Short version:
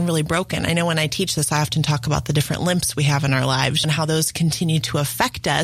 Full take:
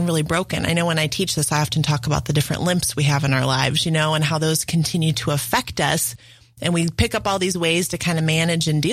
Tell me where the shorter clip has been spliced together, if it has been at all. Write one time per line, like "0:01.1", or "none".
0:03.8